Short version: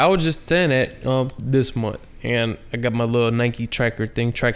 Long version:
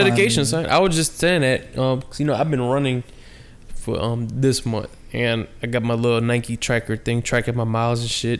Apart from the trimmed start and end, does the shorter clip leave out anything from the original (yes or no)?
yes